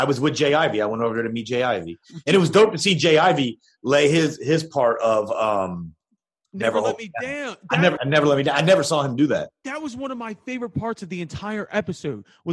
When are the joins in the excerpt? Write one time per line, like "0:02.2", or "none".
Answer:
0:08.0